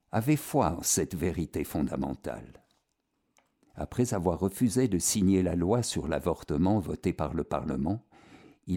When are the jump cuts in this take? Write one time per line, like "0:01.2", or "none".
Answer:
none